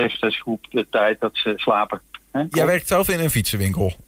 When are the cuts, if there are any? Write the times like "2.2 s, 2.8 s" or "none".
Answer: 2.5 s